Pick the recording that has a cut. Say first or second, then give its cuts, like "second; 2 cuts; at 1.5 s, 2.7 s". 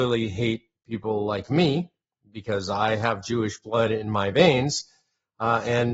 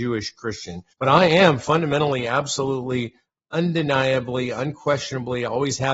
second; 1 cut; at 0.9 s